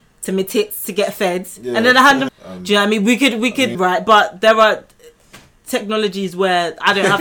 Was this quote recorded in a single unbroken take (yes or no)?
no